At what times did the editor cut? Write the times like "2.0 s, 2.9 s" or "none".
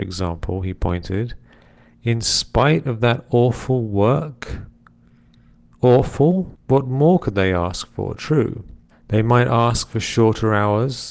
6.5 s, 8.9 s